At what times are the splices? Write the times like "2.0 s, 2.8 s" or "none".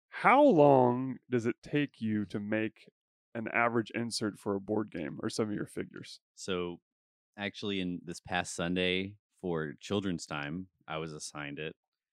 8.0 s